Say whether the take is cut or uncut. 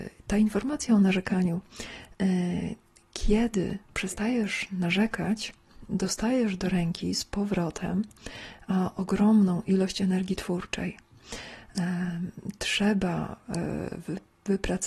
uncut